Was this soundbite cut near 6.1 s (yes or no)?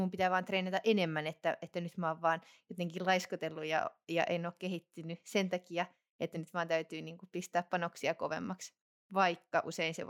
no